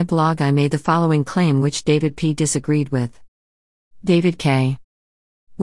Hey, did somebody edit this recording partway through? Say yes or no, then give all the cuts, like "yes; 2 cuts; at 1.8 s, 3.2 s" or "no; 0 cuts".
no; 0 cuts